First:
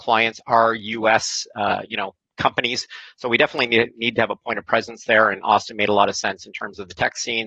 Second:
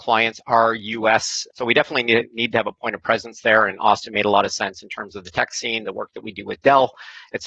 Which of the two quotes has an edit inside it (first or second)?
second